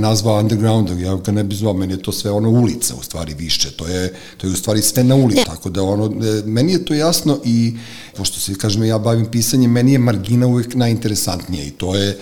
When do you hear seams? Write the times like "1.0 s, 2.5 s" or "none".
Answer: 5.4 s, 8.1 s